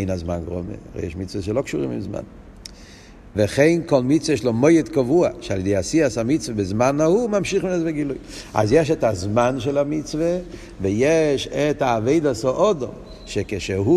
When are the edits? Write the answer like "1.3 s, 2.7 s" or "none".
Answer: 3.3 s